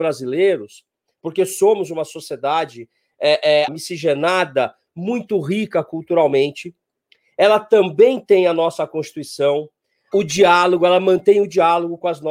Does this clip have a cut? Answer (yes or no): yes